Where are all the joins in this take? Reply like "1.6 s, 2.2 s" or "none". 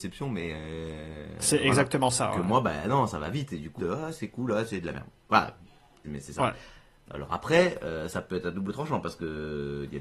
3.8 s, 6.0 s